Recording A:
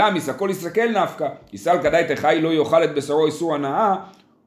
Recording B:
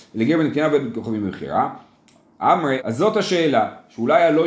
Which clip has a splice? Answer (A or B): B